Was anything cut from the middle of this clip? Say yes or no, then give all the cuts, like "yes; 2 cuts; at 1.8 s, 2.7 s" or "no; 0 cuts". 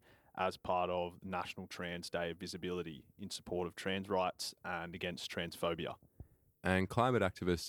yes; 1 cut; at 6.5 s